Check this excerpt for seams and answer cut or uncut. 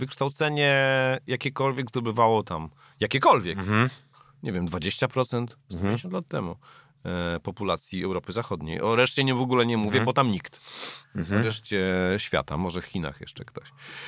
uncut